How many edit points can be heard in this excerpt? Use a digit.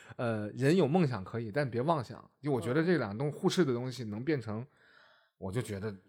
0